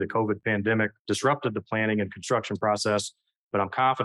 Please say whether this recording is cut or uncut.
cut